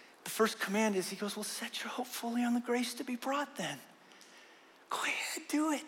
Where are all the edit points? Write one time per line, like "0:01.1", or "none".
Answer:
none